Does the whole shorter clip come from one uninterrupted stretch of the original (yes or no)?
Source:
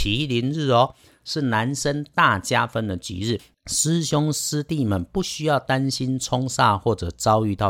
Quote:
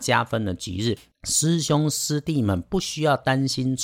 yes